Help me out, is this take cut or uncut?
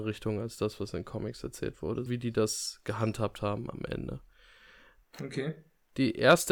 cut